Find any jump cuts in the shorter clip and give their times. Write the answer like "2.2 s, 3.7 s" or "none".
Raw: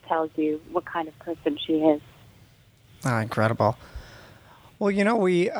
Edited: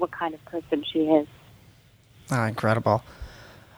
none